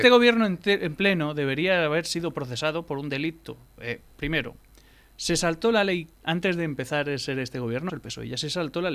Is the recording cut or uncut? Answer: cut